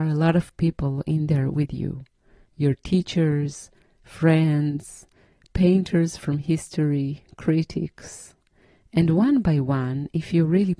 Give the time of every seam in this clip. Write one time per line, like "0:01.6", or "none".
none